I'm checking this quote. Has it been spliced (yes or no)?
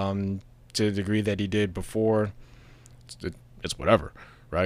yes